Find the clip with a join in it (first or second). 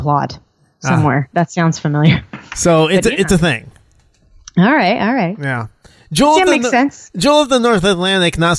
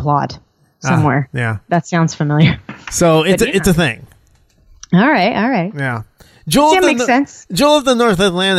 first